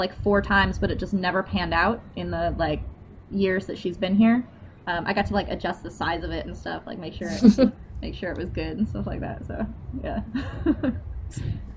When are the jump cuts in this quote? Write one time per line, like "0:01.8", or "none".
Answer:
0:04.8

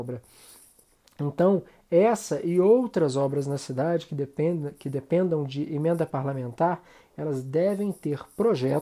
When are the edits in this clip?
none

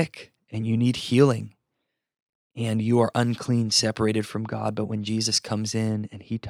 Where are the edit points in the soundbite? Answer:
none

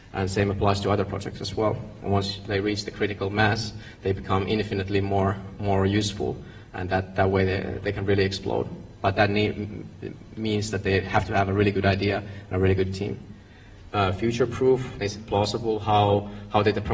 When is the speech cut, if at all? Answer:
0:09.2
0:13.9
0:15.0

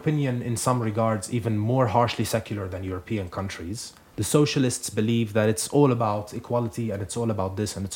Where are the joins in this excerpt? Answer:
0:04.1

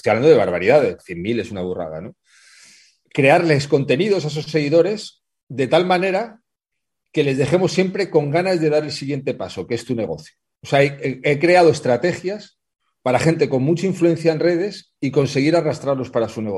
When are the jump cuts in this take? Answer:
0:01.0

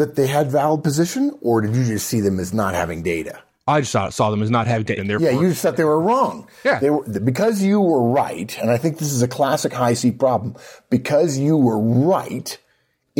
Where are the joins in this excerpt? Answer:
0:05.0

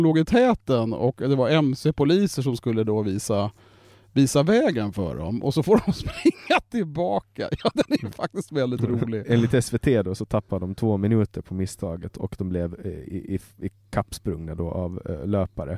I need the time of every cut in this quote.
none

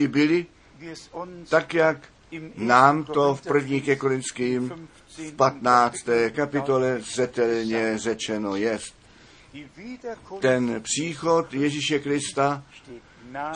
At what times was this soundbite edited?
0:06.3

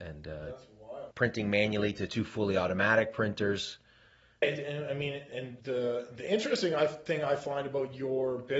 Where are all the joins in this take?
0:01.1
0:04.4
0:05.6

